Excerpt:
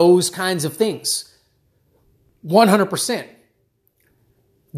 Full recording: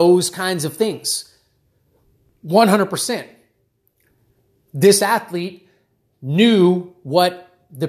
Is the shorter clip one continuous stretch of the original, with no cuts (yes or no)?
yes